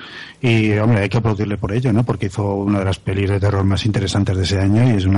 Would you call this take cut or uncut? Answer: uncut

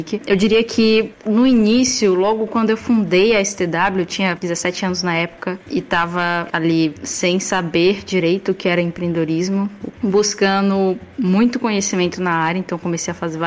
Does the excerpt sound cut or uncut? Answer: cut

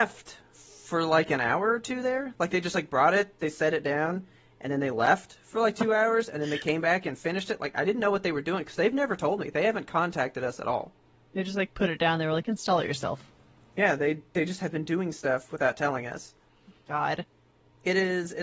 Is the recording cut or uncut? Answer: uncut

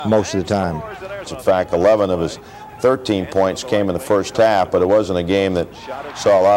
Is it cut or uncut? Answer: cut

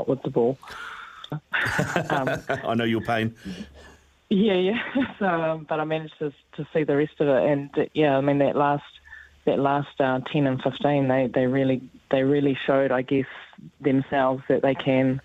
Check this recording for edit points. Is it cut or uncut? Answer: cut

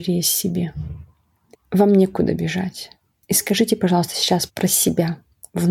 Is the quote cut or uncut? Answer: cut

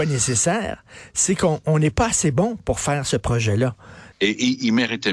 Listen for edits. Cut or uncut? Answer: cut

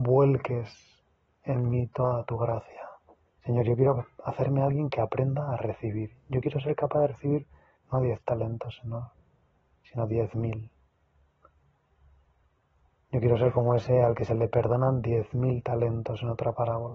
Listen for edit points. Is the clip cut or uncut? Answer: cut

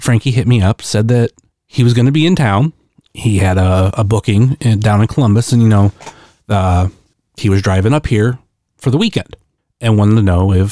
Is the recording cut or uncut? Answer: uncut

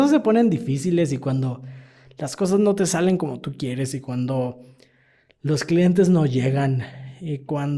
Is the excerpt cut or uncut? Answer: uncut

